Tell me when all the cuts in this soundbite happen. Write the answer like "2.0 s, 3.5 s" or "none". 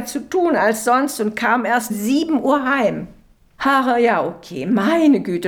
1.9 s, 3.6 s